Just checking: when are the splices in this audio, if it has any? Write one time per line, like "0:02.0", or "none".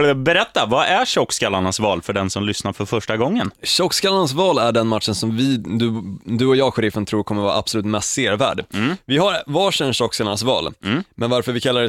none

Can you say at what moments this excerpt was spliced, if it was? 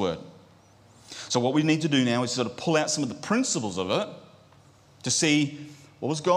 none

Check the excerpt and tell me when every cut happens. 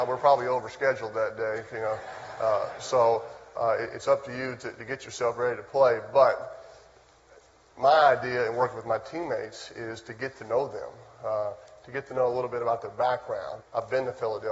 0:13.6

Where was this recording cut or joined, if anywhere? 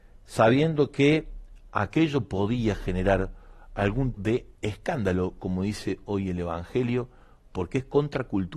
0:04.1

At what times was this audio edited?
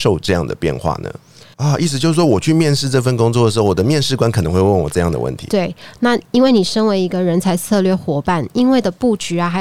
0:01.5

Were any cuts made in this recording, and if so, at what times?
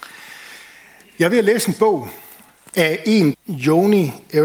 0:03.3

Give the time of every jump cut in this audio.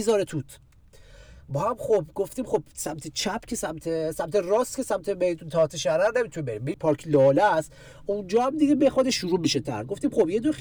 0:06.7

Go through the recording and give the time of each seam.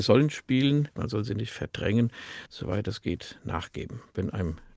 0:00.9
0:02.5

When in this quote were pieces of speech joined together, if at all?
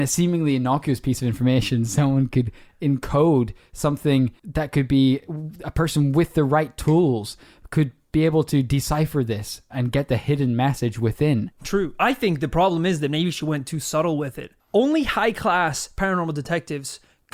0:09.7

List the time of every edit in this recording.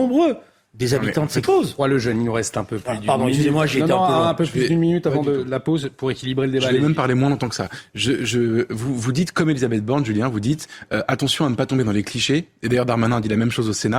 0:01.4

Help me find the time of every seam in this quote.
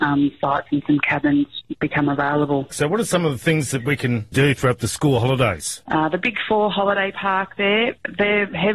0:02.7
0:05.8

